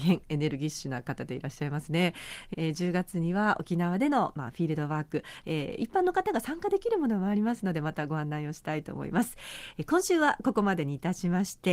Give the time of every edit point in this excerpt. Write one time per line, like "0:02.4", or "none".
0:02.5